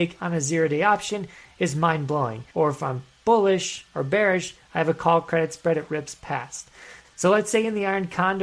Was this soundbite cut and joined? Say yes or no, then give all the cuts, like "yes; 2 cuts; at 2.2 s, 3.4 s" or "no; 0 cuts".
yes; 2 cuts; at 2.5 s, 7.0 s